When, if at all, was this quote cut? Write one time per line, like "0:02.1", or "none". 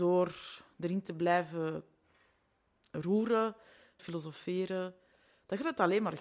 0:04.0